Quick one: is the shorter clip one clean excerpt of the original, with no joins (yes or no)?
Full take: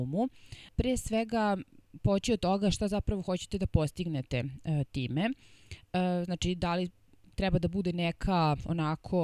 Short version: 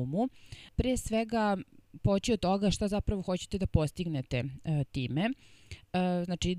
yes